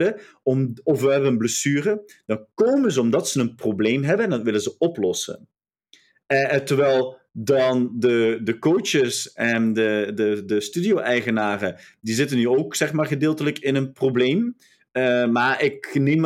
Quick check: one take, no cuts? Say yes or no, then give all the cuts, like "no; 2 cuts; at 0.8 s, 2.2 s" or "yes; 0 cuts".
yes; 0 cuts